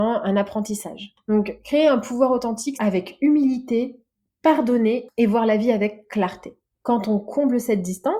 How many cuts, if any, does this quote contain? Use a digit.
2